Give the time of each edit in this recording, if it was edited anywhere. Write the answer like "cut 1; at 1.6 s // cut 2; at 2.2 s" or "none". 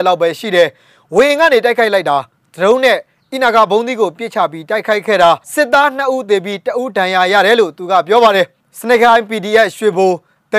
cut 1; at 5.4 s